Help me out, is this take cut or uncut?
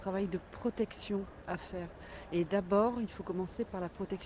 uncut